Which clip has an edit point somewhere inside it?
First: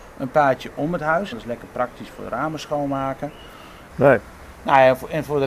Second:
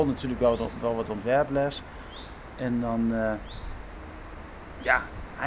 first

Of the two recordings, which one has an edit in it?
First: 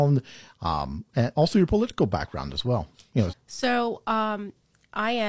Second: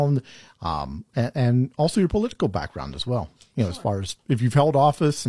first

